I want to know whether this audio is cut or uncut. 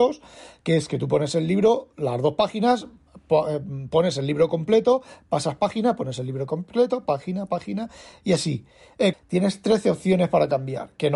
cut